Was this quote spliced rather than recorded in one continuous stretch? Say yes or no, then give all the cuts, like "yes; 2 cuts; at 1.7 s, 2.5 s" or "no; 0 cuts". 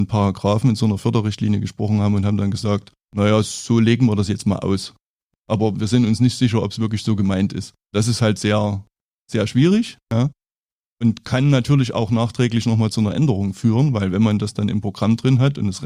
no; 0 cuts